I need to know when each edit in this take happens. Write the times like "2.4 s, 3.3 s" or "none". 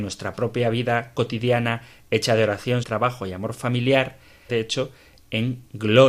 2.8 s, 4.5 s